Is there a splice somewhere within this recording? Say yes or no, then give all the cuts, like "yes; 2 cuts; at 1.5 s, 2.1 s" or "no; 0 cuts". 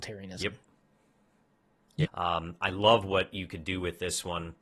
yes; 1 cut; at 2.0 s